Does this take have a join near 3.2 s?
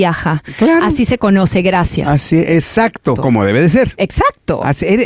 yes; 1 cut; at 3.2 s

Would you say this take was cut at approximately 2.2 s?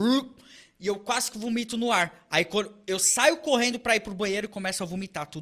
no; 0 cuts

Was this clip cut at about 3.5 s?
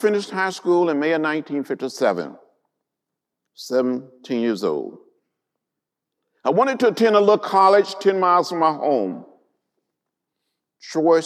no; 0 cuts

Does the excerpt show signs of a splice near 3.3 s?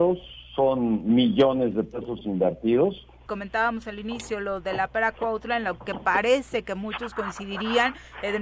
yes; 1 cut; at 3.3 s

